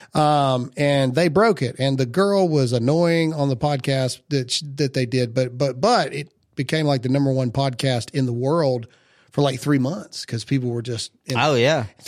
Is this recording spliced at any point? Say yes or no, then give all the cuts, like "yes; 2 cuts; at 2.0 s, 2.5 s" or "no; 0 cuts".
no; 0 cuts